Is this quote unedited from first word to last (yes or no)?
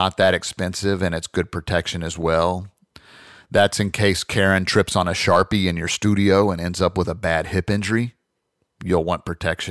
yes